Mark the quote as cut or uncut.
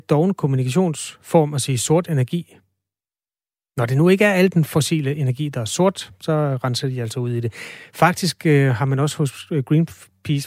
uncut